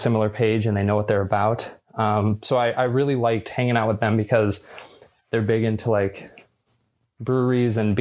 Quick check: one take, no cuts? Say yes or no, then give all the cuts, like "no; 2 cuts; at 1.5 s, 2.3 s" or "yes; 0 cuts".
yes; 0 cuts